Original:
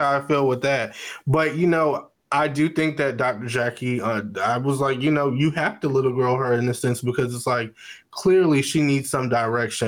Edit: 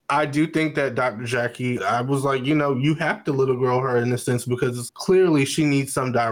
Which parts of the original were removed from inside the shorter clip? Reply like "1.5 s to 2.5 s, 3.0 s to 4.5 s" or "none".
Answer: 4.0 s to 4.3 s, 7.4 s to 8.1 s